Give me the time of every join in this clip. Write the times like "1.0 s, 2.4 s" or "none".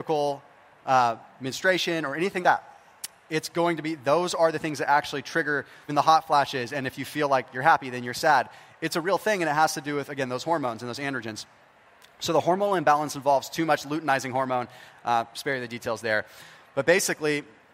2.4 s, 5.9 s